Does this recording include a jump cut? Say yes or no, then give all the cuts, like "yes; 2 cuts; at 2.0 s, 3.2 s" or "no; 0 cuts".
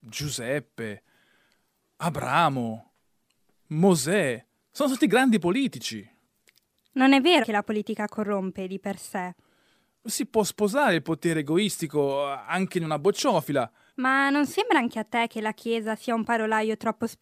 yes; 2 cuts; at 7.4 s, 13.9 s